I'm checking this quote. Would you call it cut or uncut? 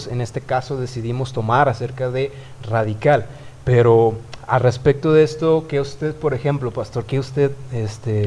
uncut